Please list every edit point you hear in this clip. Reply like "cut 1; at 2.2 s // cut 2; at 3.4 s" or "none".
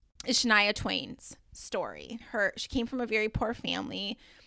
cut 1; at 2.2 s

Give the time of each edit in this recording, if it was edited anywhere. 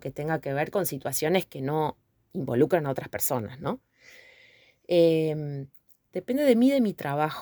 none

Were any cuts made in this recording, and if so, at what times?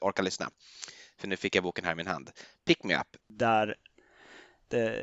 cut 1; at 3.2 s

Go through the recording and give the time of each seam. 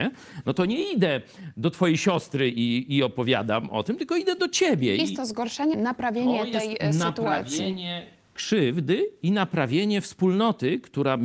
cut 1; at 5.7 s

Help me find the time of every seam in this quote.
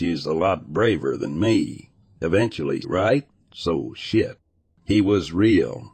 cut 1; at 2.8 s

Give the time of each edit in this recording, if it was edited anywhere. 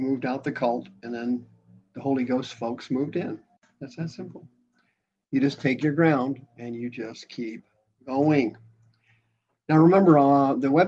none

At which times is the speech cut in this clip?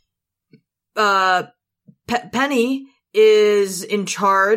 none

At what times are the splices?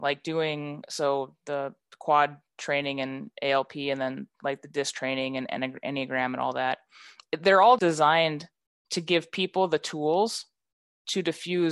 cut 1; at 7.8 s

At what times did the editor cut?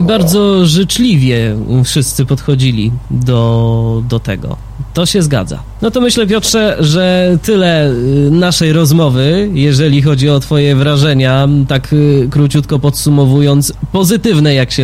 none

